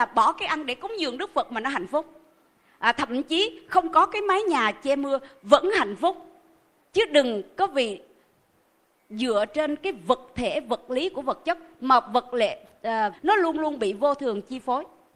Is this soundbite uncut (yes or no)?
no